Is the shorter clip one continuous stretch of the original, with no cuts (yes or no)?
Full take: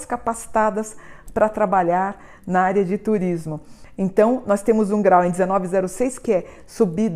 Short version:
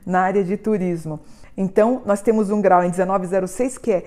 yes